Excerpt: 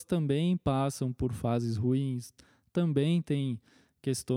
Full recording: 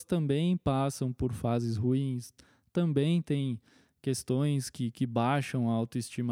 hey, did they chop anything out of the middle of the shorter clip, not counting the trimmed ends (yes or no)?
no